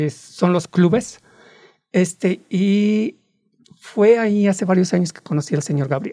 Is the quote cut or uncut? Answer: uncut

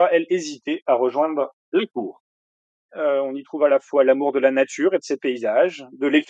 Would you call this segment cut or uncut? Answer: cut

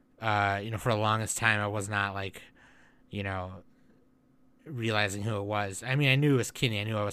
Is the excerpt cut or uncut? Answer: uncut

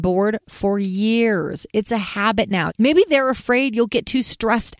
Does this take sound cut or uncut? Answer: cut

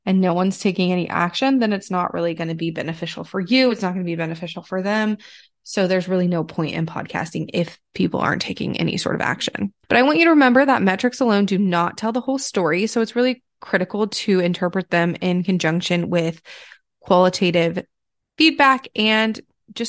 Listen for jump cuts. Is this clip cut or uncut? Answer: uncut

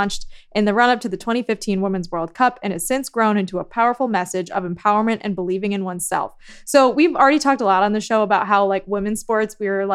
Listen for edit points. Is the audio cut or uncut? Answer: uncut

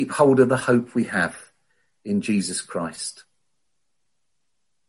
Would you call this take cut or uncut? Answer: uncut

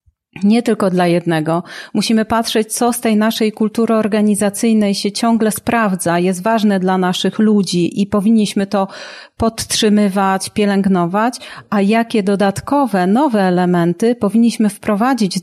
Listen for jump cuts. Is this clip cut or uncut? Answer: uncut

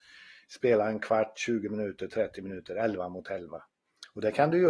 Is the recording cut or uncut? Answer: uncut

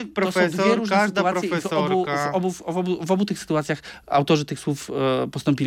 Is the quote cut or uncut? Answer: uncut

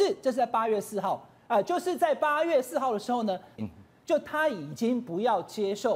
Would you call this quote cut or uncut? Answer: cut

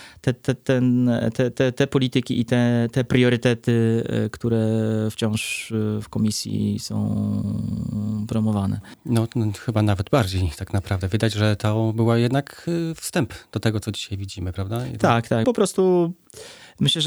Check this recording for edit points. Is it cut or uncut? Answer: cut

